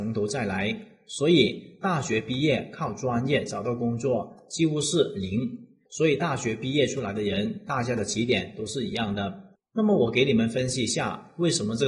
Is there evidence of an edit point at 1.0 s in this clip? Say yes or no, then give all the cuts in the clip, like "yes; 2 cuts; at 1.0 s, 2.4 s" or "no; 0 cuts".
no; 2 cuts; at 5.9 s, 9.5 s